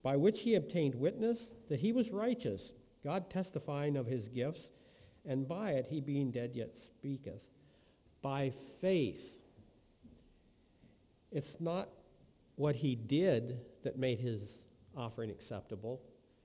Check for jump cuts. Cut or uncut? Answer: uncut